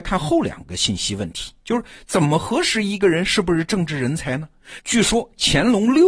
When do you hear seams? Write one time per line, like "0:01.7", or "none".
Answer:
0:04.8